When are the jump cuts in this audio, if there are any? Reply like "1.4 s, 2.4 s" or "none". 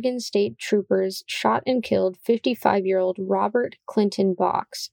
none